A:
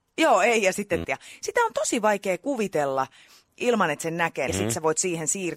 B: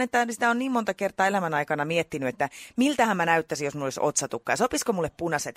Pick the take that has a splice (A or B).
A